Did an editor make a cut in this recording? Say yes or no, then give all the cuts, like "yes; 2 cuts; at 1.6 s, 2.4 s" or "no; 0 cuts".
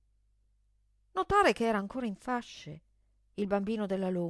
no; 0 cuts